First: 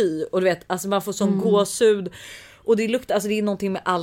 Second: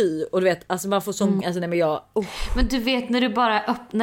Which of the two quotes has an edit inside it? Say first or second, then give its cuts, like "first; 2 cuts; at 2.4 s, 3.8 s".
second; 1 cut; at 1.4 s